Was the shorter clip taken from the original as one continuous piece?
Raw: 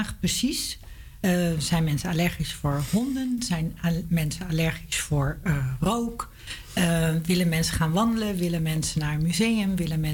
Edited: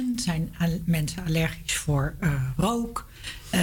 yes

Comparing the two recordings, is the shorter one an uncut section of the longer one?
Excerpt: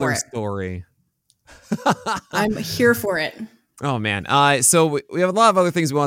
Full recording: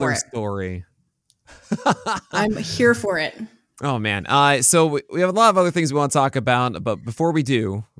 yes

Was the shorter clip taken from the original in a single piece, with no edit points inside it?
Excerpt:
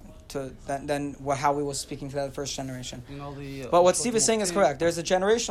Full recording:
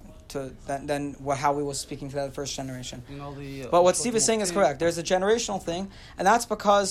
yes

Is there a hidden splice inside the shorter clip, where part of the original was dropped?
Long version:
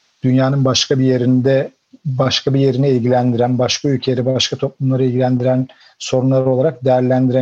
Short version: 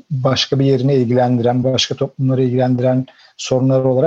yes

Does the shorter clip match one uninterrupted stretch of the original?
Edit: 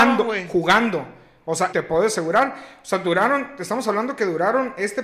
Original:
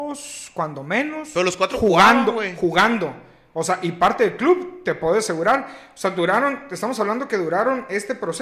no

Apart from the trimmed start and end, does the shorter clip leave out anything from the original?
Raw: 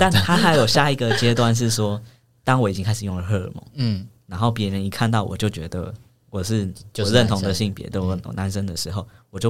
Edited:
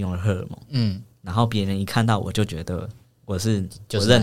no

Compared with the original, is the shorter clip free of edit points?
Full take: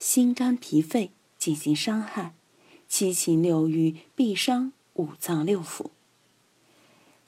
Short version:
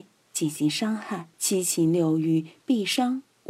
no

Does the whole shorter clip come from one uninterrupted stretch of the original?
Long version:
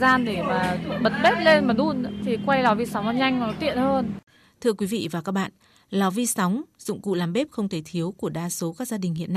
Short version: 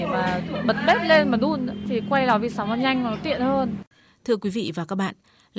yes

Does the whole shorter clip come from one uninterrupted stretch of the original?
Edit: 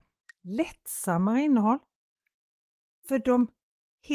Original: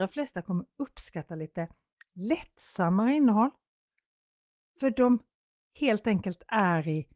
yes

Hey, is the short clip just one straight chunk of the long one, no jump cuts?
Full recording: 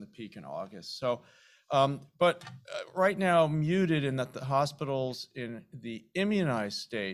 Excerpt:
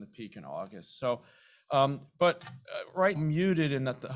no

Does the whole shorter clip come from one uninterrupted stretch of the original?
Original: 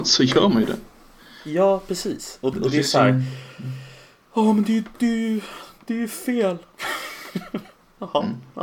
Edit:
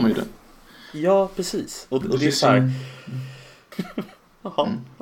no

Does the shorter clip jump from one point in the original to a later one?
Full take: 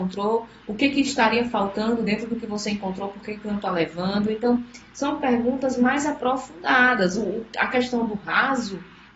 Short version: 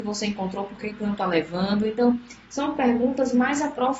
no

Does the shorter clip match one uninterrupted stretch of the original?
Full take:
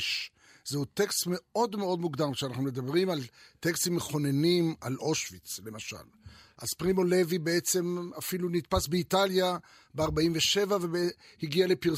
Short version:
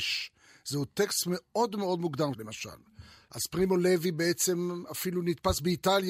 no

